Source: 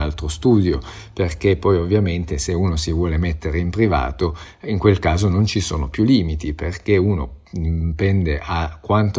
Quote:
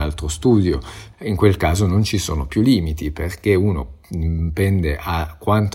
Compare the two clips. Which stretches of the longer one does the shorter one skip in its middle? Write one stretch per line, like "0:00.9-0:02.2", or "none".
0:01.1-0:04.6